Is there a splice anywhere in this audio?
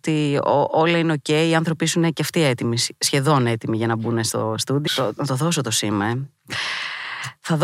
yes; 1 cut; at 4.9 s

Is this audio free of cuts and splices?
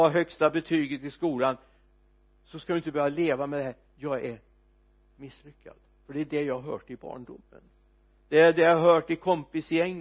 yes; 0 cuts

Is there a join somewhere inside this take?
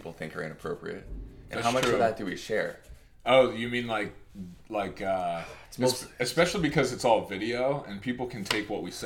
no; 0 cuts

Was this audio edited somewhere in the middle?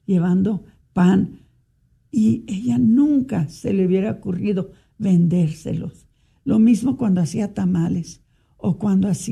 no; 0 cuts

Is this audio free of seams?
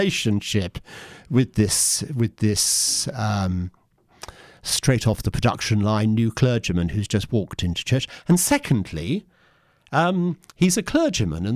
yes; 0 cuts

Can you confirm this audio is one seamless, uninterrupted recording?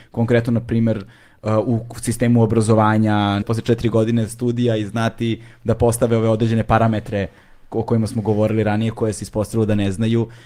no; 1 cut; at 3.4 s

